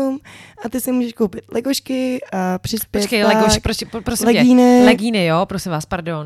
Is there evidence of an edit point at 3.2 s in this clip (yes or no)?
no